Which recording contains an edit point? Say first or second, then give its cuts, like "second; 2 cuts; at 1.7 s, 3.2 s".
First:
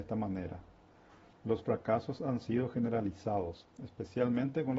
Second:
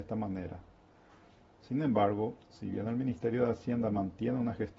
first; 1 cut; at 1.3 s